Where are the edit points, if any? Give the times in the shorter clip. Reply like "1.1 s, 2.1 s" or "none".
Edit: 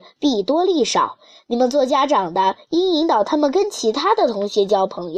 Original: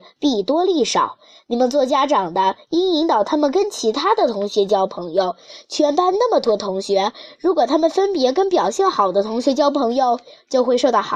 none